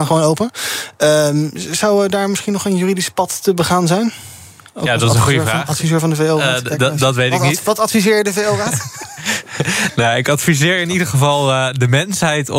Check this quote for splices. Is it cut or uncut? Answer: uncut